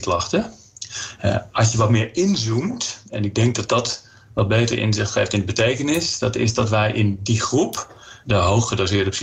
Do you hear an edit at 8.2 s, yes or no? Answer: yes